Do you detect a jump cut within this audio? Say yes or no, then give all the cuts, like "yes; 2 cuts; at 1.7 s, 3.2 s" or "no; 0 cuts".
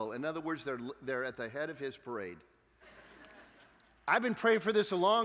yes; 1 cut; at 2.8 s